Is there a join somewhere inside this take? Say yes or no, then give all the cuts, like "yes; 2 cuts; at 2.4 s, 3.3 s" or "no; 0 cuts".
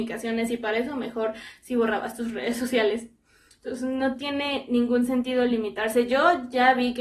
no; 0 cuts